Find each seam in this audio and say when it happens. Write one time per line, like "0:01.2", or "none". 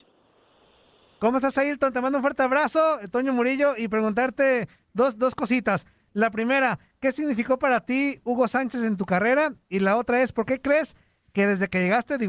none